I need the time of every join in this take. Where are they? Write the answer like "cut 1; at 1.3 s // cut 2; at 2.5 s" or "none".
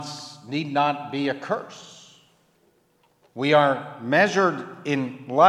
none